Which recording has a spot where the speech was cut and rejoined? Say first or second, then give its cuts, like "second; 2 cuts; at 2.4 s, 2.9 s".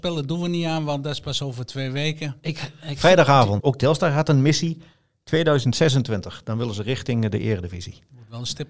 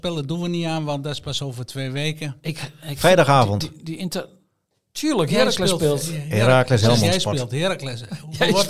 first; 1 cut; at 3.6 s